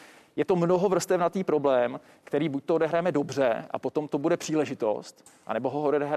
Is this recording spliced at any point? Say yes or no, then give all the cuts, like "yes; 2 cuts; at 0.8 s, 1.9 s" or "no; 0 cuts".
no; 0 cuts